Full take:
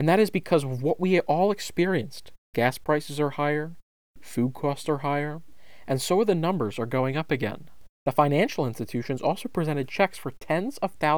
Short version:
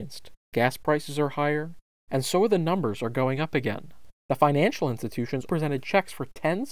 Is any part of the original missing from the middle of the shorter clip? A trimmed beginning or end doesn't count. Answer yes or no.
yes